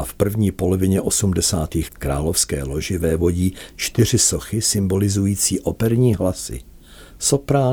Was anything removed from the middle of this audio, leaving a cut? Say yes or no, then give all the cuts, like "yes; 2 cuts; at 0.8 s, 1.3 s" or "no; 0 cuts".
yes; 1 cut; at 1.9 s